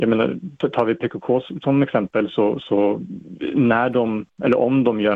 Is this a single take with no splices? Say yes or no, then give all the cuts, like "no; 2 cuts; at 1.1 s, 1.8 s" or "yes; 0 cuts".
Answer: yes; 0 cuts